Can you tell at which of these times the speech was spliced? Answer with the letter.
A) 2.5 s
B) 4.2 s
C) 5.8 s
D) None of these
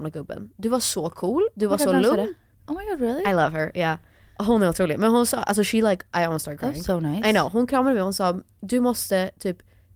A